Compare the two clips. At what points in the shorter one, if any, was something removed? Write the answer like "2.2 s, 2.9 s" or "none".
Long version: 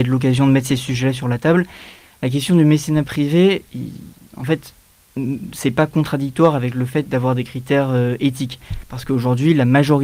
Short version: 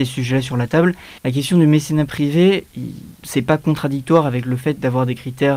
1.2 s, 3.2 s

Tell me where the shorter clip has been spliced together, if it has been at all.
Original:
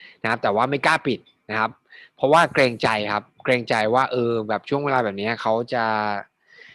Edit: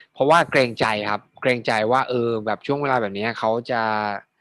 none

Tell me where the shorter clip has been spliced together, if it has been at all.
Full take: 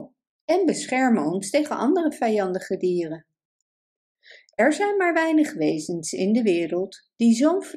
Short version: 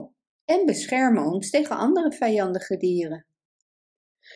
none

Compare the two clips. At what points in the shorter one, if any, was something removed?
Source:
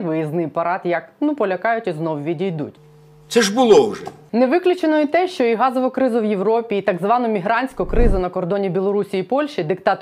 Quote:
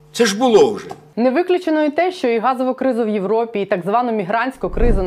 none

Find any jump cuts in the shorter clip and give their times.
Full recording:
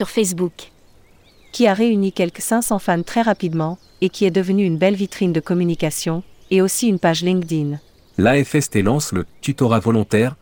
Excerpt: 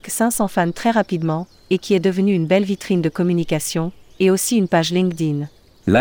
none

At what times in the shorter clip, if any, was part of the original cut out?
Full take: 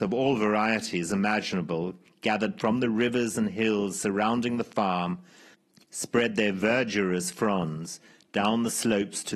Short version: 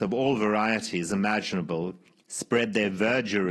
2.2 s

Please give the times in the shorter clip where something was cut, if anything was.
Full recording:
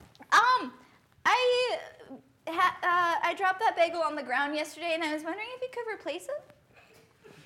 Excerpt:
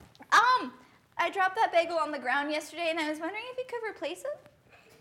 1.2 s

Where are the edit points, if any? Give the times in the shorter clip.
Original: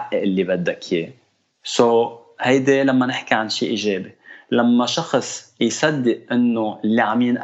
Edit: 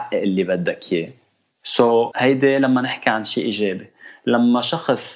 2.1 s

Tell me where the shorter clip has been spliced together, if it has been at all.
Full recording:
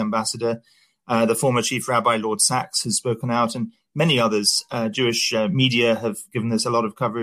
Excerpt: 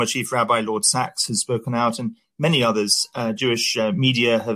none

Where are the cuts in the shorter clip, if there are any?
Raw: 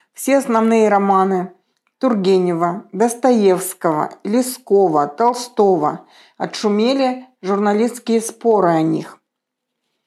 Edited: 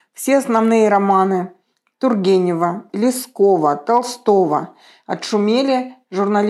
2.9 s

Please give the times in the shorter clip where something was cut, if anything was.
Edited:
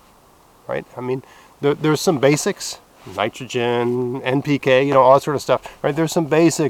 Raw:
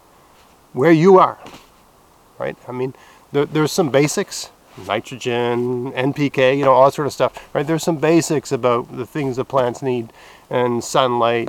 none

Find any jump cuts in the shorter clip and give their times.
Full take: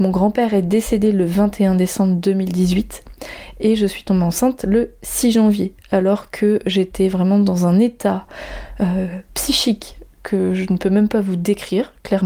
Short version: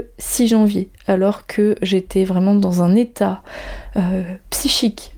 none

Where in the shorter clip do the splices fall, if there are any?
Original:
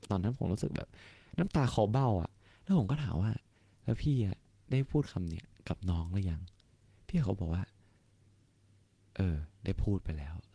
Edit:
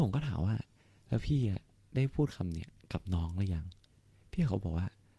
none

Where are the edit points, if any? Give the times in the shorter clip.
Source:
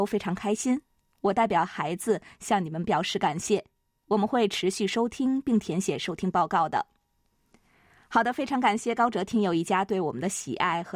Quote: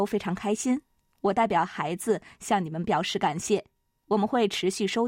none

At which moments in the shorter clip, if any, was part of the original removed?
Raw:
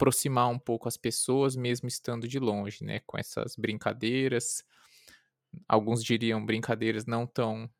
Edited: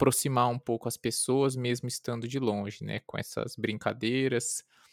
none

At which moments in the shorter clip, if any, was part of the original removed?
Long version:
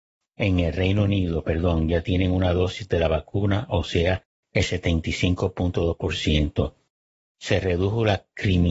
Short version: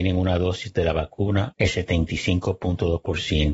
1.5 s

